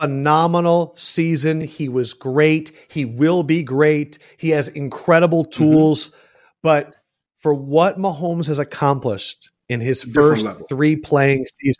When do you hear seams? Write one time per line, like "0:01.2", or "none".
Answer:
none

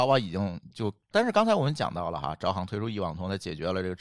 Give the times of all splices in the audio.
0:01.1

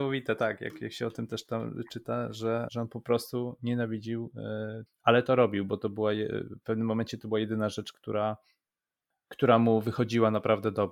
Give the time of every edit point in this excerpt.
0:02.7
0:04.9

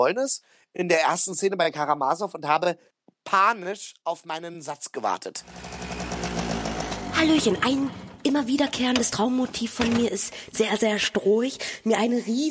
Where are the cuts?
0:10.5

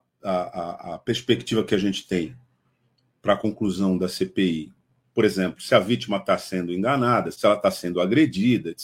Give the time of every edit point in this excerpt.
0:05.0
0:07.3

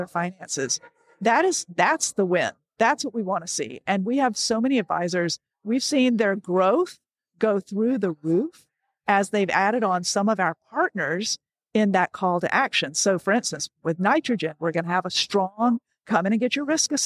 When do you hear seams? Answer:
none

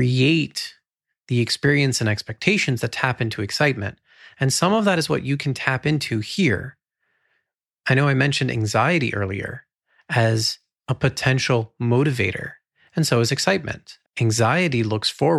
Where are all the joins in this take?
0:14.0

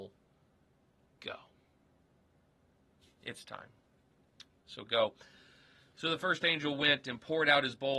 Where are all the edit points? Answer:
0:03.0

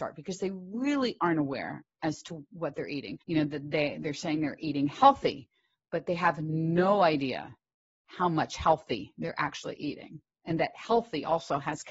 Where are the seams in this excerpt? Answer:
0:03.2

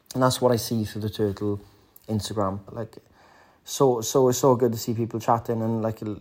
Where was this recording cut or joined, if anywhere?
0:02.7

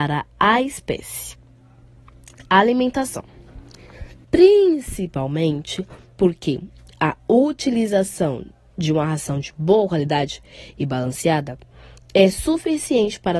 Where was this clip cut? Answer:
0:04.2

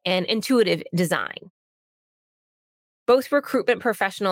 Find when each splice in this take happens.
none

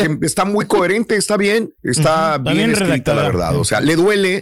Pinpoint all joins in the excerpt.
0:01.8

